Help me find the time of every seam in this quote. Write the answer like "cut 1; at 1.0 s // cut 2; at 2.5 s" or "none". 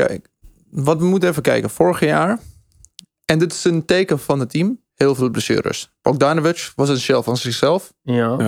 cut 1; at 4.9 s